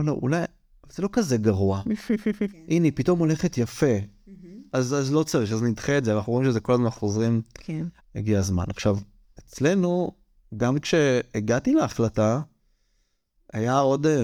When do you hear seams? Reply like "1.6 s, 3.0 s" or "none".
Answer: 2.5 s, 8.0 s